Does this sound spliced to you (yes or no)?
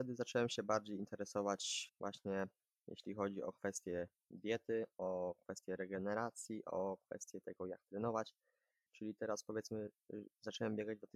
yes